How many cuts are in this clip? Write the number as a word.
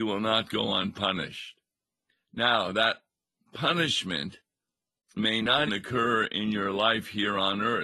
one